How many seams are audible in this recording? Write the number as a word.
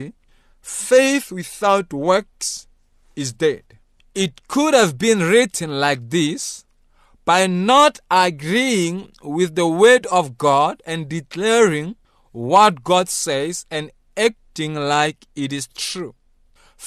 zero